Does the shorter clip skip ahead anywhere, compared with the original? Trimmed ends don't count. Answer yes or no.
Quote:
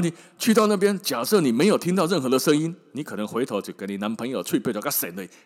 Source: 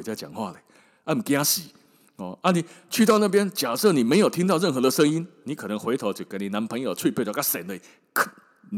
no